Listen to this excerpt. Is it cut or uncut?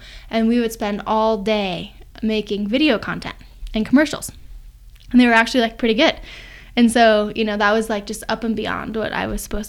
uncut